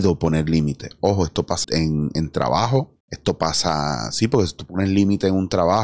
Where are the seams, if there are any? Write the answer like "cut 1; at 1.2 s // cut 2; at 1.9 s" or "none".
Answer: cut 1; at 1.6 s // cut 2; at 3.0 s